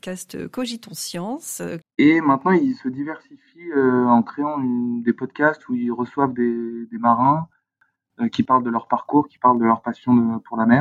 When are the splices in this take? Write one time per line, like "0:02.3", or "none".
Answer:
0:01.8